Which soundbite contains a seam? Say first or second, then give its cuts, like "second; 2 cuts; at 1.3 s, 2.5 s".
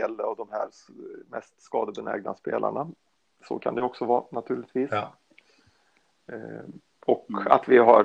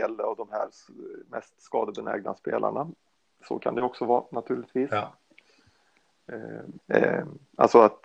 second; 1 cut; at 6.8 s